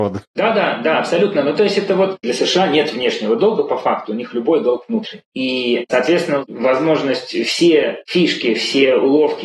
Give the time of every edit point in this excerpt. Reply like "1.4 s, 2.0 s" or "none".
none